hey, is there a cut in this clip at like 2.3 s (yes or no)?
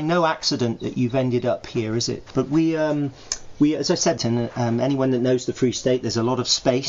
yes